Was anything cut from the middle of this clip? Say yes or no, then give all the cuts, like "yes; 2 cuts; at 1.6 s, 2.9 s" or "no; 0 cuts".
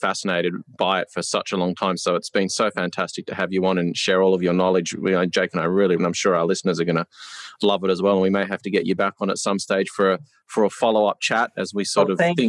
yes; 1 cut; at 6.0 s